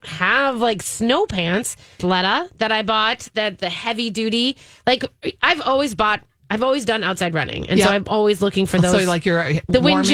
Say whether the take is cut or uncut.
cut